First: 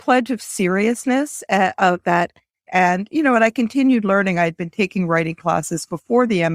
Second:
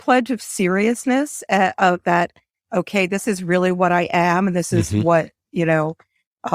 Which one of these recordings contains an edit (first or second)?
first